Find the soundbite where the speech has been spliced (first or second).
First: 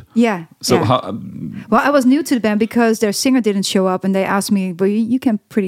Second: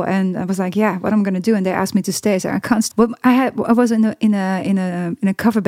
second